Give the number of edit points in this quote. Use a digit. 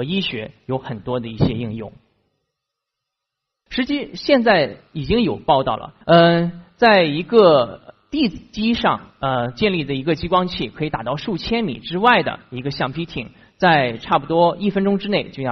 2